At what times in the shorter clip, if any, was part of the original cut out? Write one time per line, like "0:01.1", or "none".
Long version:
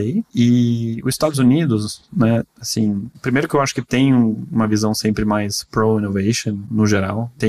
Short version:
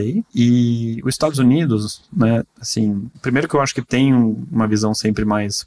none